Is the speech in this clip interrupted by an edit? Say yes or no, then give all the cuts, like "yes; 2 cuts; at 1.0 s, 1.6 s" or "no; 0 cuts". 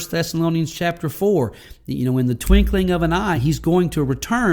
no; 0 cuts